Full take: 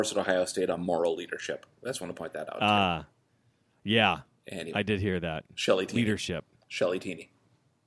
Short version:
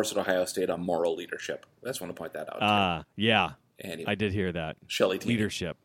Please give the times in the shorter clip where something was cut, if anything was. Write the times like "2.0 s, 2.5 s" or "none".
3.0 s